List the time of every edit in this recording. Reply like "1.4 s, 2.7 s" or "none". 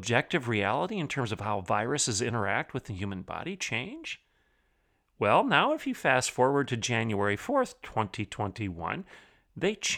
none